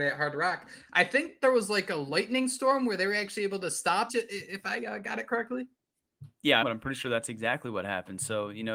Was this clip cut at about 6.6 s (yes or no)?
yes